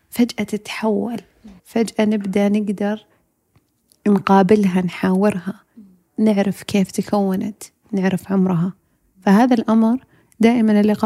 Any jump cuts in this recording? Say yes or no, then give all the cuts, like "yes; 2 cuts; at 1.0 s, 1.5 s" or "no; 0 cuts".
yes; 1 cut; at 1.6 s